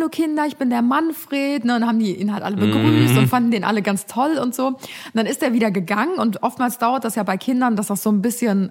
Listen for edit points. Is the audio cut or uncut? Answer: uncut